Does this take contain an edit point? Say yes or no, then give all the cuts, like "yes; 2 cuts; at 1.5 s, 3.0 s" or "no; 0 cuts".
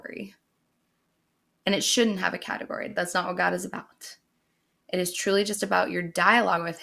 no; 0 cuts